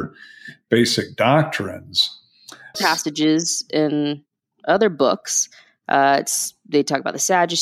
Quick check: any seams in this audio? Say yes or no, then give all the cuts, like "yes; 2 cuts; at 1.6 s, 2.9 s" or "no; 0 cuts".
yes; 1 cut; at 2.7 s